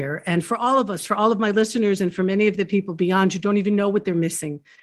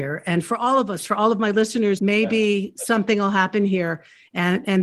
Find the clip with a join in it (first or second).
second